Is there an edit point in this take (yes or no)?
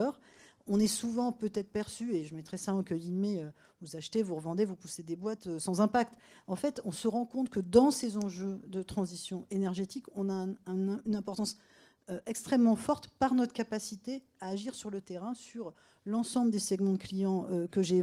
no